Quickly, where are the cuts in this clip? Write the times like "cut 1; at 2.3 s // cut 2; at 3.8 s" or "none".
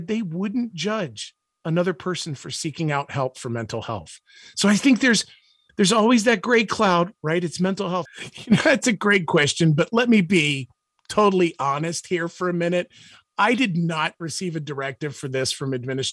cut 1; at 8.1 s